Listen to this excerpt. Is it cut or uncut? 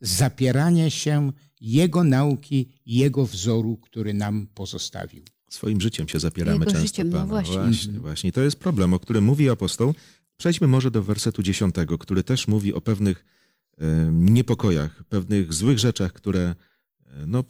uncut